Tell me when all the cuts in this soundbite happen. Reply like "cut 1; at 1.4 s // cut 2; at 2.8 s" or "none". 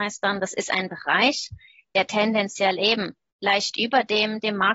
none